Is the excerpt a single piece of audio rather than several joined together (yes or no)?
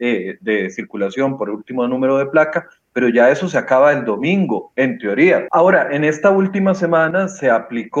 no